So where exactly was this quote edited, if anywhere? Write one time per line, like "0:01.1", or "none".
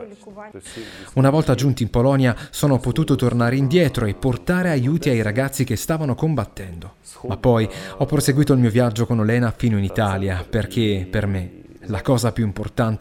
none